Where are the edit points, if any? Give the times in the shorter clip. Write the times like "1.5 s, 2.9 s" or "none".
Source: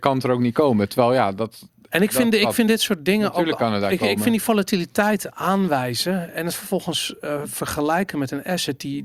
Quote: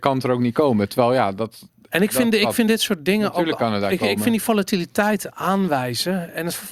none